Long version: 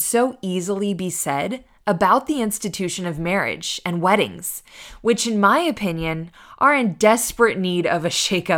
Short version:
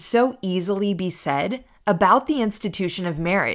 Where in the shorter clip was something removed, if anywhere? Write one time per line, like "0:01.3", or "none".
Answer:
none